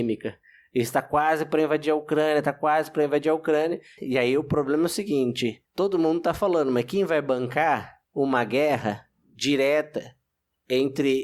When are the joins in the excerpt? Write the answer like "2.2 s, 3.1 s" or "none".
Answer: 4.0 s, 5.7 s, 8.0 s